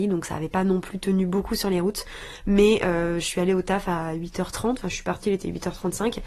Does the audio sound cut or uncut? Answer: uncut